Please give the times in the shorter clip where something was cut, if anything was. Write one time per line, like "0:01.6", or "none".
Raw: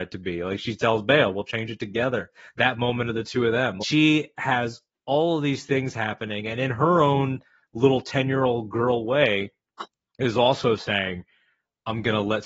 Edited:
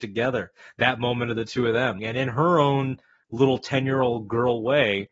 0:02.0